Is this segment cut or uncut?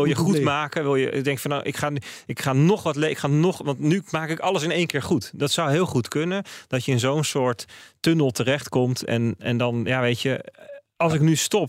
uncut